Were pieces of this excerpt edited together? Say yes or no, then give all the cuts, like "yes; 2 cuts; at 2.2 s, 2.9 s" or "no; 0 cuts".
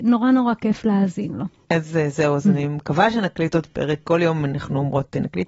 no; 0 cuts